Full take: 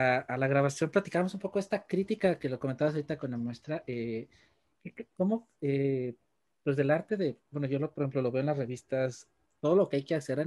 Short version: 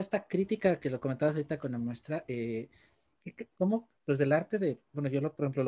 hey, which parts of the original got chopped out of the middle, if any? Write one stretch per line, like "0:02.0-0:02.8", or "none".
0:05.5-0:06.5